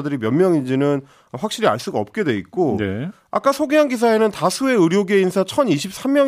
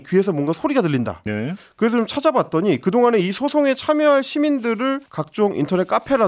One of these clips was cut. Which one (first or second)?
second